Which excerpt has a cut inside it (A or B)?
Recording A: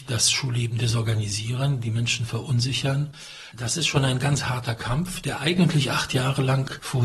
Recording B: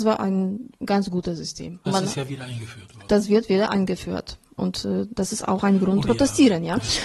B